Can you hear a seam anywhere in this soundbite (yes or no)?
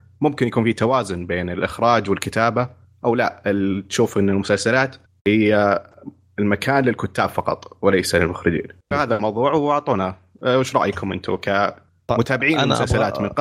yes